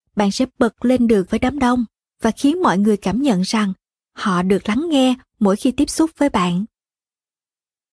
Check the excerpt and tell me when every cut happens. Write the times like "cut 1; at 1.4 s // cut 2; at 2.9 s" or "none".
cut 1; at 1.3 s